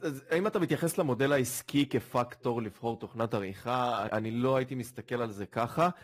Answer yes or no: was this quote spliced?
yes